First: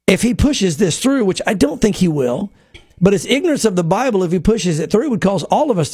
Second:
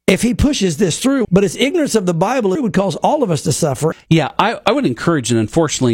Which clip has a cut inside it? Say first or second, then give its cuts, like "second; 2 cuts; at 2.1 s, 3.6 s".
second; 3 cuts; at 1.2 s, 2.6 s, 3.9 s